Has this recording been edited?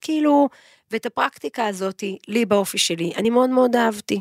no; 0 cuts

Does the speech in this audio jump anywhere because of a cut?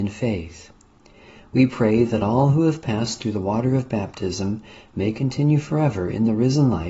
no; 0 cuts

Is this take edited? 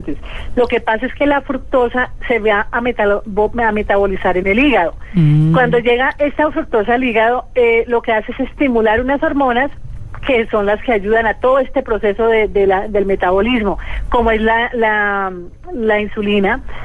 no; 0 cuts

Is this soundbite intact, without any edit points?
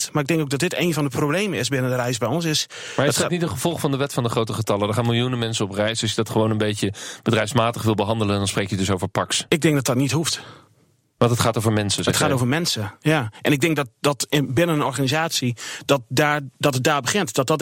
yes; 0 cuts

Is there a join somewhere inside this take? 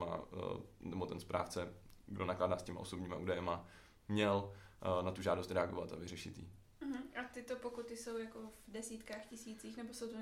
no; 0 cuts

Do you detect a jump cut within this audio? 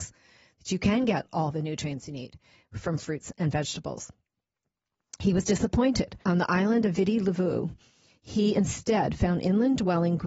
yes; 1 cut; at 6.2 s

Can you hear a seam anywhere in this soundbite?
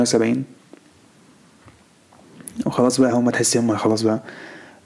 no; 0 cuts

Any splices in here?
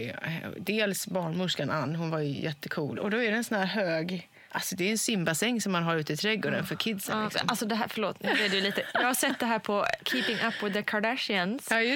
yes; 1 cut; at 3.0 s

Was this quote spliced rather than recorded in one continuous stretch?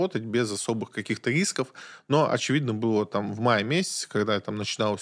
no; 0 cuts

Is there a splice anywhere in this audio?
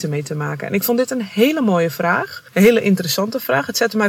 yes; 1 cut; at 2.5 s

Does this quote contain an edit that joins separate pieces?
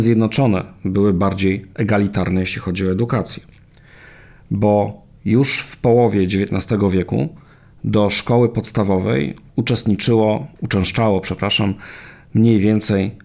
no; 0 cuts

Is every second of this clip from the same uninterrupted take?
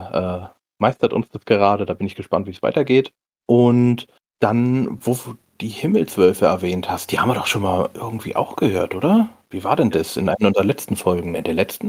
yes; 0 cuts

